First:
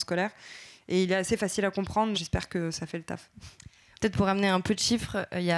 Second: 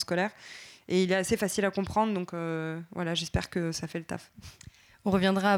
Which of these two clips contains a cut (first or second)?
first